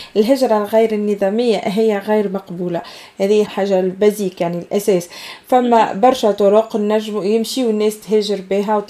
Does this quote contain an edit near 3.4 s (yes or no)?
yes